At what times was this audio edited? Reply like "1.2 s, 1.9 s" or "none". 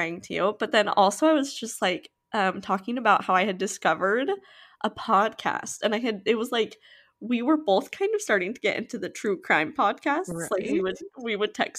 none